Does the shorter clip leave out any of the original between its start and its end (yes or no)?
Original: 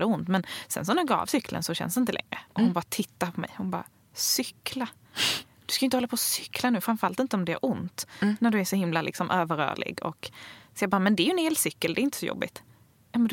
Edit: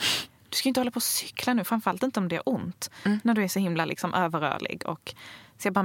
no